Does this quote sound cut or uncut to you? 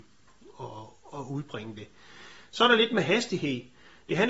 uncut